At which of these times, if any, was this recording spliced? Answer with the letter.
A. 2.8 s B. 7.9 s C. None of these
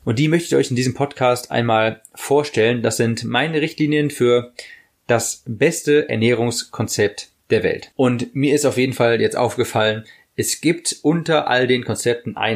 B